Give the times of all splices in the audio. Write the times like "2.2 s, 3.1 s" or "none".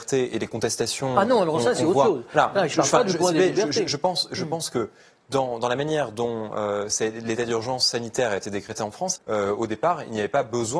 5.6 s, 9.2 s